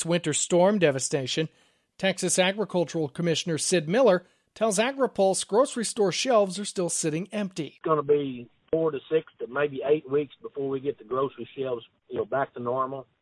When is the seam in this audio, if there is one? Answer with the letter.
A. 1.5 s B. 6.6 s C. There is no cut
C